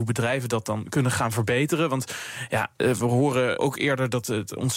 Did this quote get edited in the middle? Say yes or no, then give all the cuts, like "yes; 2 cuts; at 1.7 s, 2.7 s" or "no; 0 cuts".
yes; 1 cut; at 3.6 s